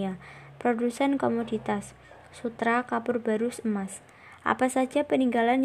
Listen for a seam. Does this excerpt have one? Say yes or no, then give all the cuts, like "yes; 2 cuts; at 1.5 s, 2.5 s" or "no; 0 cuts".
no; 0 cuts